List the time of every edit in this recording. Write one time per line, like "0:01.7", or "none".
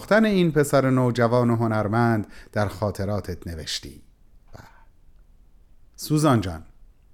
0:04.5